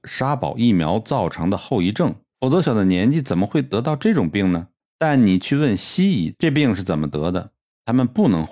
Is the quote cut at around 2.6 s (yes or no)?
yes